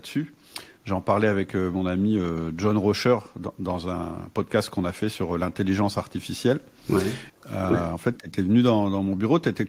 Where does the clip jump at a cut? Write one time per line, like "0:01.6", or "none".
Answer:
0:07.3